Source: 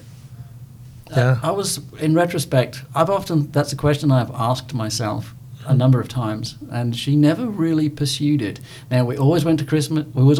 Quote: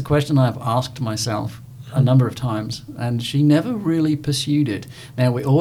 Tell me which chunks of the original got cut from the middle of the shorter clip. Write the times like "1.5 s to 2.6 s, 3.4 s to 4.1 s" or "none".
none